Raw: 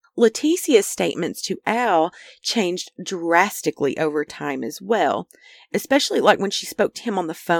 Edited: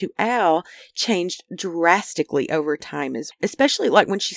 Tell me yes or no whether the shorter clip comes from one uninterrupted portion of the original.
no